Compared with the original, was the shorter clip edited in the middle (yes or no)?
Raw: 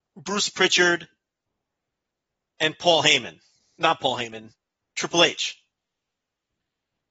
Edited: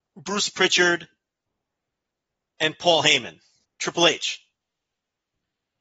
yes